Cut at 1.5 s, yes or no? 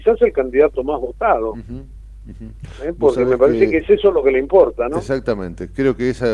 no